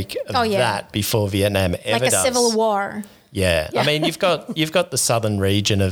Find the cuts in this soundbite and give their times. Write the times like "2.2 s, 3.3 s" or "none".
none